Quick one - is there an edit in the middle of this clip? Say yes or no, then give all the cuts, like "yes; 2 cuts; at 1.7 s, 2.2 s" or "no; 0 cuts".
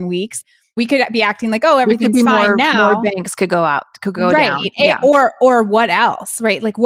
no; 0 cuts